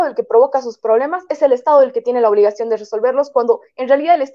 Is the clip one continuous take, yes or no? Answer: yes